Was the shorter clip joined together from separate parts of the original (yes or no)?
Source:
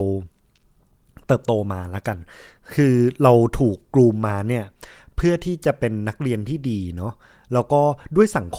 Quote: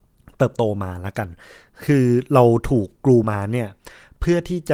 yes